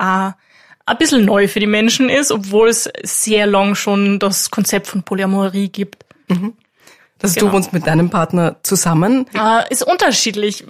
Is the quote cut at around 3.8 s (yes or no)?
no